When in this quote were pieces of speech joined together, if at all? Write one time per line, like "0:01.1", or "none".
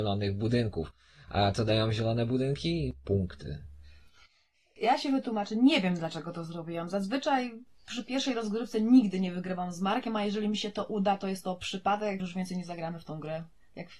0:12.2